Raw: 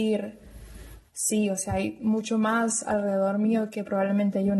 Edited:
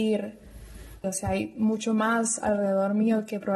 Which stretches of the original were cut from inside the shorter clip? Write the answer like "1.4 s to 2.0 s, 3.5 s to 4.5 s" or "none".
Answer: 1.0 s to 1.5 s